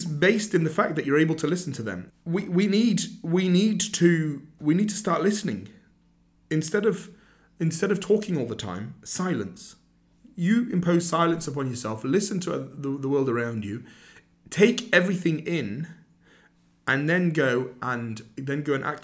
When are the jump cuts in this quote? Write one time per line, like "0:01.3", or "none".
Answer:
0:02.1